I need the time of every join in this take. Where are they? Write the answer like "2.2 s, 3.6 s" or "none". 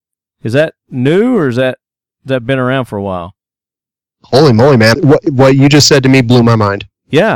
4.9 s